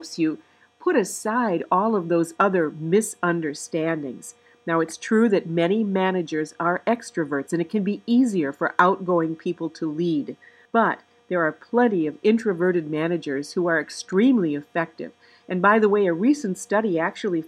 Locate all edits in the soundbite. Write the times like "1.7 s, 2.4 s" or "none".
none